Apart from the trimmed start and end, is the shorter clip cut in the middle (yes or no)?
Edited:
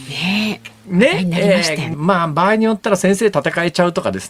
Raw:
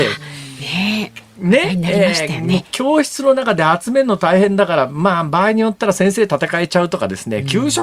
yes